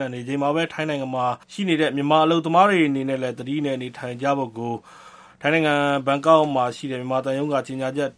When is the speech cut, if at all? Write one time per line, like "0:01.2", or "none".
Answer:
0:01.4